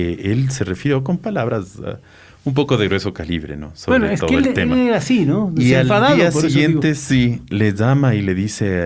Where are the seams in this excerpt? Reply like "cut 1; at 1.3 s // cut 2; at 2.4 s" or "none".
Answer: none